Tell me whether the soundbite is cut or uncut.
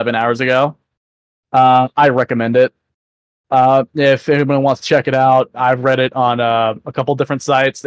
uncut